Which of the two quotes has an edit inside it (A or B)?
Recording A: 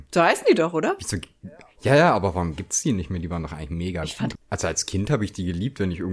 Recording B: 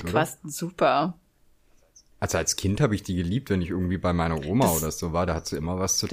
A